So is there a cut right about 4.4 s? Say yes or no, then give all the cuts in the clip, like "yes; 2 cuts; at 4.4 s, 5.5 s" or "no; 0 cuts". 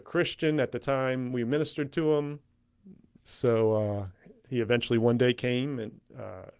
no; 1 cut; at 3.2 s